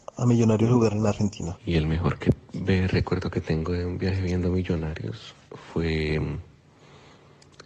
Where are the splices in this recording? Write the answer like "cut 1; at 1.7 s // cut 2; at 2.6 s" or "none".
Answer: cut 1; at 1.6 s

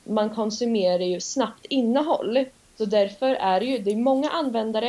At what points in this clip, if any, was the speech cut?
cut 1; at 2.7 s

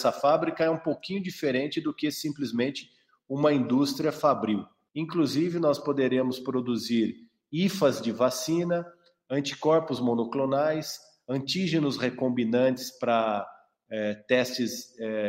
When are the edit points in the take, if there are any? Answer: cut 1; at 4.9 s

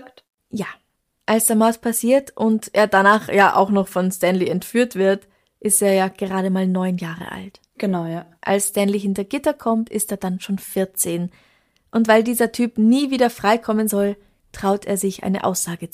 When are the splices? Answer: none

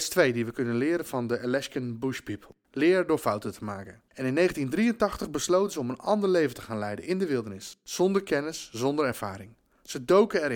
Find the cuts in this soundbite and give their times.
cut 1; at 4.1 s

